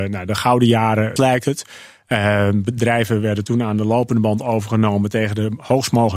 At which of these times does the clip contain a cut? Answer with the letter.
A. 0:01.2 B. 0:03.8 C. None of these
A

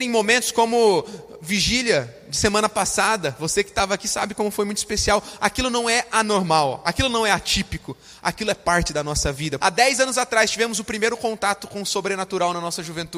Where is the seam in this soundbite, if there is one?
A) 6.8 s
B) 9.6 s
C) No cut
B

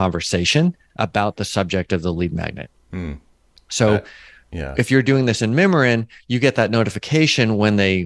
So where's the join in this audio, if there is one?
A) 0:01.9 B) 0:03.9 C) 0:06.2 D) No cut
D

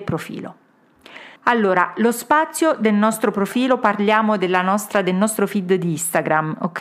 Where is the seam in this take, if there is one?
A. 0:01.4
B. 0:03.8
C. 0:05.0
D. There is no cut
A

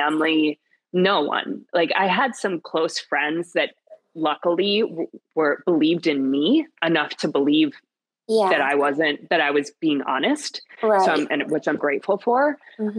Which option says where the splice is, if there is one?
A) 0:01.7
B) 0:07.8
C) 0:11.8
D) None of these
C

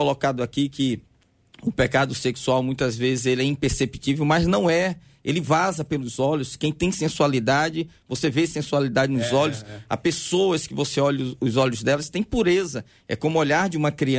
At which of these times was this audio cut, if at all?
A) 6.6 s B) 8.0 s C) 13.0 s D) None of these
D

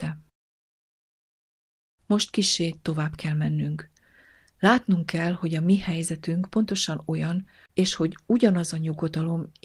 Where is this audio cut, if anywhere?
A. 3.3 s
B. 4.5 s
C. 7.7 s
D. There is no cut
C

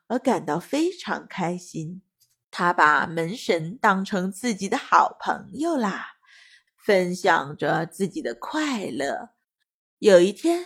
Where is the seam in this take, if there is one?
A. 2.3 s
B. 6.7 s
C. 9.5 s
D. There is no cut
B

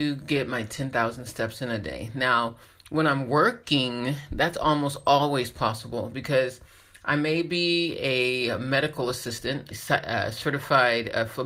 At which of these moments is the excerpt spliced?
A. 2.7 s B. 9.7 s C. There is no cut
B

